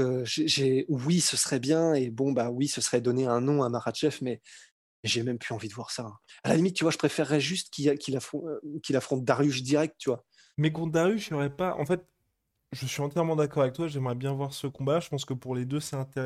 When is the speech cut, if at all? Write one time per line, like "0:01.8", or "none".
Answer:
none